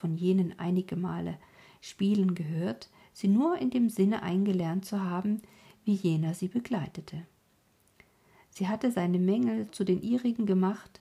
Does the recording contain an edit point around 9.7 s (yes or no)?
yes